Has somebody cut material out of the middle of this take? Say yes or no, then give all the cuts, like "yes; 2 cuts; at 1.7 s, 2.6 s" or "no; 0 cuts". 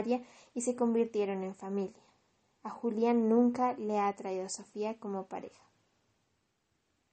no; 0 cuts